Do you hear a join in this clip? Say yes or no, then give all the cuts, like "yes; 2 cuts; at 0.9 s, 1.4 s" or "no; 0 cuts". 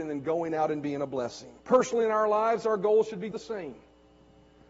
yes; 2 cuts; at 1.6 s, 3.3 s